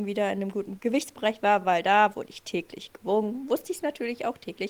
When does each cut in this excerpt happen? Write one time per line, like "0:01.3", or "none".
none